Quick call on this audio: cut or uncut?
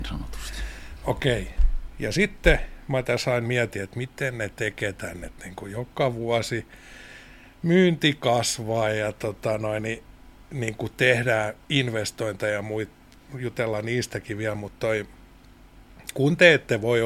uncut